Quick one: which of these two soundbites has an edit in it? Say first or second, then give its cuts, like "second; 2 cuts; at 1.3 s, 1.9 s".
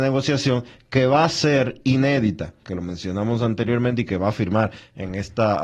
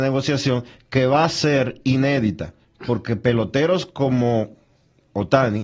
first; 1 cut; at 2.6 s